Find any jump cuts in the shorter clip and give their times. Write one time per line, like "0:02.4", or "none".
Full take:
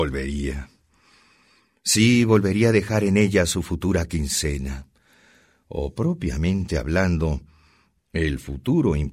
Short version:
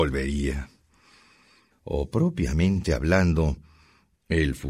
0:01.7